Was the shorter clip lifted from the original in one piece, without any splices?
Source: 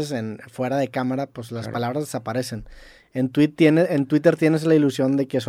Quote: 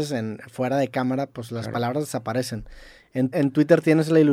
no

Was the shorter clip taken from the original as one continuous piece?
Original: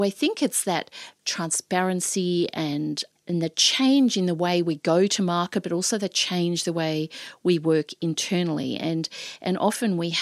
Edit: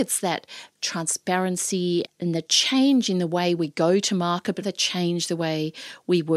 no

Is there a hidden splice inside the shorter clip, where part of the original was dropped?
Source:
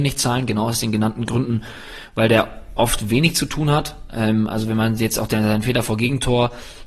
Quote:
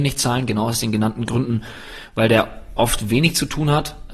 no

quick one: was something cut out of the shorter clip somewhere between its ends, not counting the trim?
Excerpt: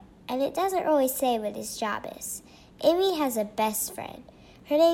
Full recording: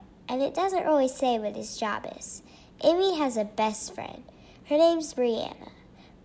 no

